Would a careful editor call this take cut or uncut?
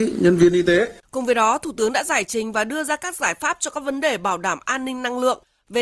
cut